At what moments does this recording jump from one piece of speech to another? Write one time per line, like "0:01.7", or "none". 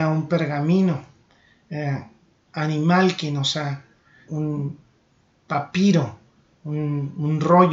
0:04.3

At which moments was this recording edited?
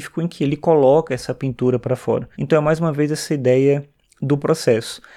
0:02.3

